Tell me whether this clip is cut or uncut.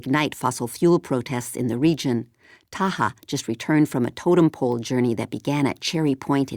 uncut